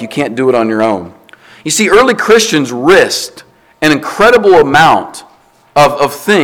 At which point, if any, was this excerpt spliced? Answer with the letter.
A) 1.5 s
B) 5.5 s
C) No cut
C